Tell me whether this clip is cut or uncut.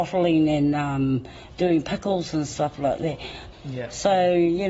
cut